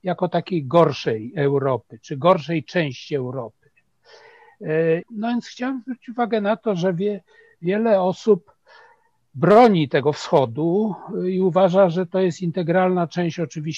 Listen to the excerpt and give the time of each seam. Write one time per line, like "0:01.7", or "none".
0:05.0